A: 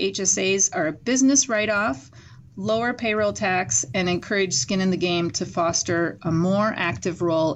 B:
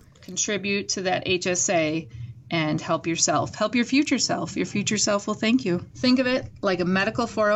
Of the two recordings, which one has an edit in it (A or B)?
B